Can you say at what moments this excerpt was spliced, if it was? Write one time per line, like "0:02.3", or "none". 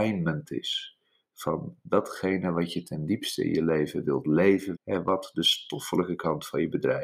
0:04.8